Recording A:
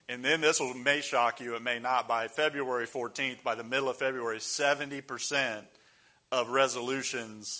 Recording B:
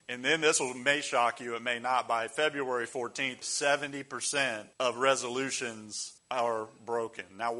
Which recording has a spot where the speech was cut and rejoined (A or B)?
B